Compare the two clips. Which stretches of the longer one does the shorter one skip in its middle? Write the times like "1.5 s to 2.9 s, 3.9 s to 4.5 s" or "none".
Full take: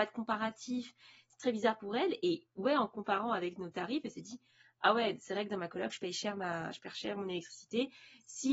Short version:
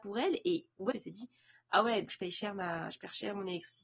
2.7 s to 4.0 s, 5.2 s to 5.9 s